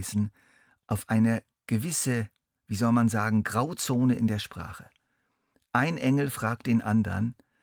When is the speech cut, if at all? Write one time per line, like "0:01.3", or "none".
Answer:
none